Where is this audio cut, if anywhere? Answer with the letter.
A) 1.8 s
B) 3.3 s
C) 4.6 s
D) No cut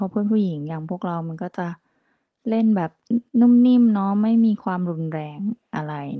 B